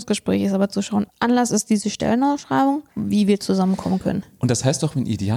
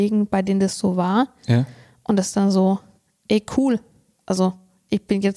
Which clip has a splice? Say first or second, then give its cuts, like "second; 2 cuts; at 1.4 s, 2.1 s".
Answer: first; 2 cuts; at 1.1 s, 2.9 s